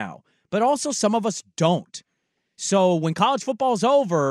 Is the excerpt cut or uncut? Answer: uncut